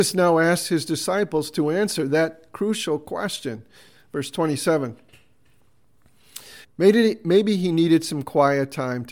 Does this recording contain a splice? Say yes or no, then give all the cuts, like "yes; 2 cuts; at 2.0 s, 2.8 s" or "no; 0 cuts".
yes; 1 cut; at 6.6 s